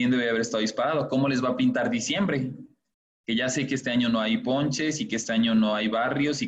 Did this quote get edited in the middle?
no; 0 cuts

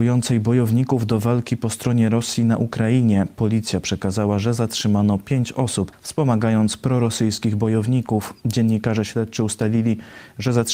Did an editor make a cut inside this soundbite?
yes; 1 cut; at 5.9 s

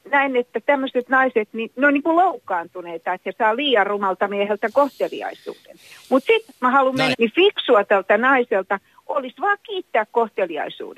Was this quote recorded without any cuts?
no; 1 cut; at 7.1 s

